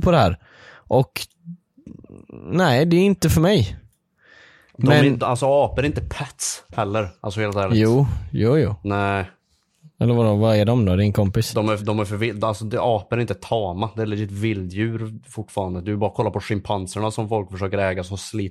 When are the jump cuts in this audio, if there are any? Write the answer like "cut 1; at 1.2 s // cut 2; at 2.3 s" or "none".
cut 1; at 11.8 s